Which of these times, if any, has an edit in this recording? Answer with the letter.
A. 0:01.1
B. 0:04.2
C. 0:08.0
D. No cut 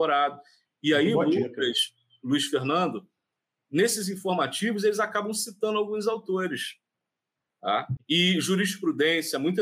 C